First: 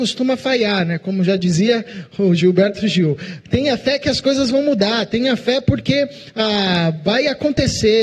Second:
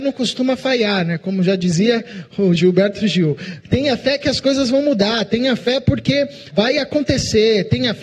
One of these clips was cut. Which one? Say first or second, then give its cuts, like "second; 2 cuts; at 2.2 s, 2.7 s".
second; 1 cut; at 6.5 s